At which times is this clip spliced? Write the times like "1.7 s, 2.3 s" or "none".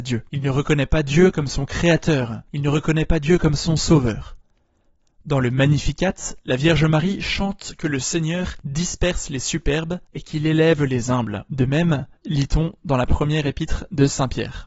10.0 s, 12.1 s